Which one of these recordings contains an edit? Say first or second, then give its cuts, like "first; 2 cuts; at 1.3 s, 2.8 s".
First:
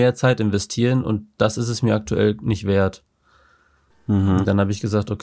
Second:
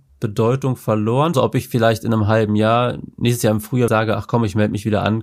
second; 2 cuts; at 1.3 s, 3.9 s